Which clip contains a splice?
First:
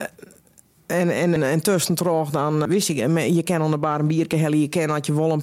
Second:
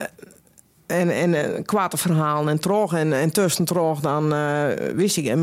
first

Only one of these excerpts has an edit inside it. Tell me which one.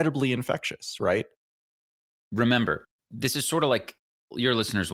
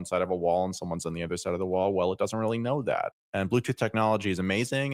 second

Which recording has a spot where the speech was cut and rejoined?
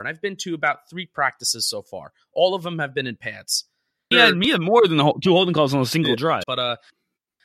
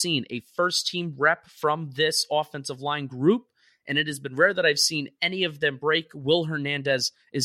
first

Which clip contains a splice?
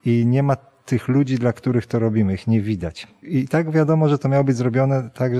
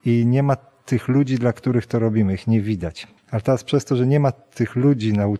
second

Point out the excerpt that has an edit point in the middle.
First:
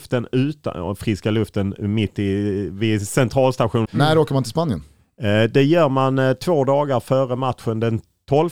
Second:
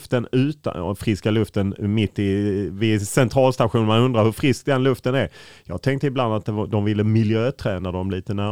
first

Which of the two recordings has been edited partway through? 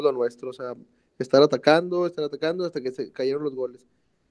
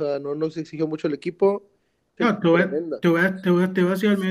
second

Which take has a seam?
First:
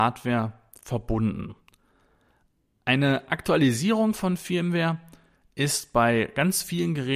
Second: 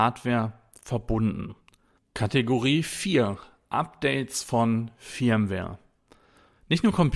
second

